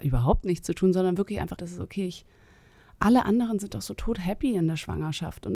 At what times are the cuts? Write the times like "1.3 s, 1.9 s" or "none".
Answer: 1.6 s